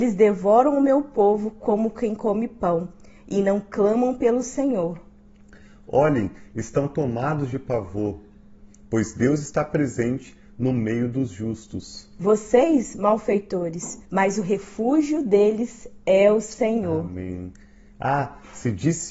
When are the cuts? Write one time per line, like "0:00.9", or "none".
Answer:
0:14.0